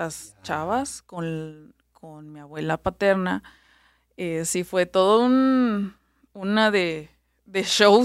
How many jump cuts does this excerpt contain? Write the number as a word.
zero